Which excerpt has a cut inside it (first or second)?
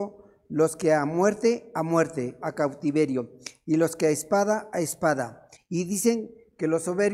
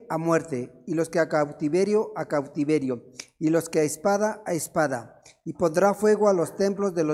first